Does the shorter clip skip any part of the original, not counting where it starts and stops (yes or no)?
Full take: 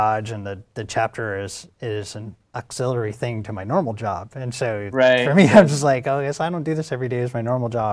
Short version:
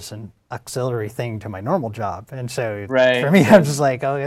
no